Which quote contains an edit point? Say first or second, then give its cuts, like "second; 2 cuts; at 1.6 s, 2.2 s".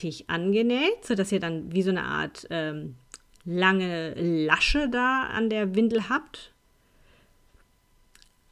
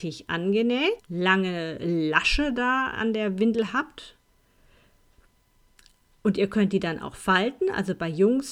second; 1 cut; at 1.0 s